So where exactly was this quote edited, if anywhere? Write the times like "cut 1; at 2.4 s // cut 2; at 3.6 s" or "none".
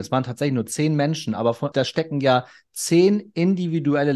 cut 1; at 1.7 s